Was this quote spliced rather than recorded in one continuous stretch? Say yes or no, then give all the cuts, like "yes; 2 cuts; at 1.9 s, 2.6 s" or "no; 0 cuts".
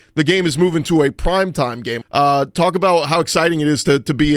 yes; 1 cut; at 2.0 s